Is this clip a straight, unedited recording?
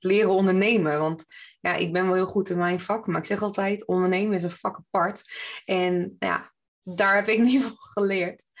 yes; 0 cuts

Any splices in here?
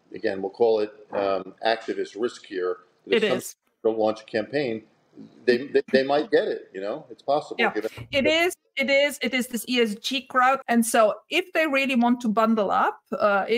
yes; 1 cut; at 10.6 s

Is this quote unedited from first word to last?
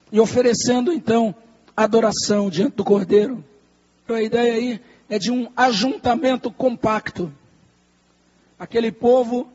no; 1 cut; at 4.1 s

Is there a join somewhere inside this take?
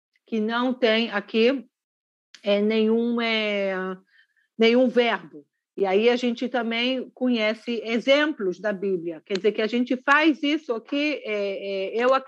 no; 0 cuts

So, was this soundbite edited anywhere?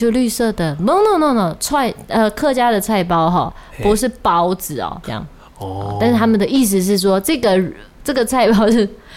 yes; 1 cut; at 5.0 s

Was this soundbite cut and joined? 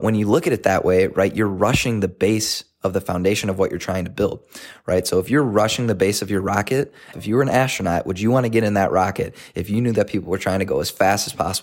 yes; 1 cut; at 7.1 s

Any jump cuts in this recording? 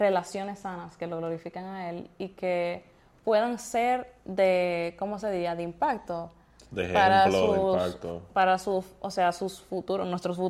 no; 0 cuts

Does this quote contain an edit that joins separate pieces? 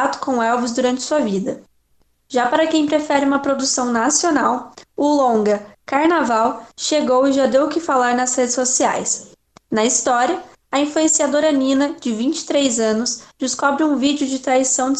yes; 1 cut; at 9.6 s

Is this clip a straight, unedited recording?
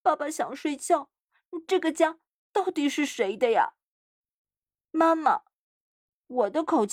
yes; 0 cuts

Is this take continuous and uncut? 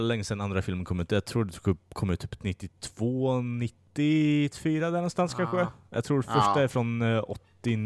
no; 1 cut; at 3.9 s

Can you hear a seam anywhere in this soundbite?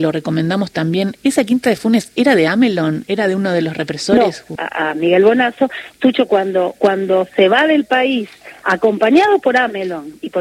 yes; 1 cut; at 4.6 s

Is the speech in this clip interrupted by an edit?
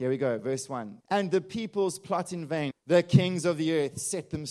yes; 2 cuts; at 1.0 s, 2.7 s

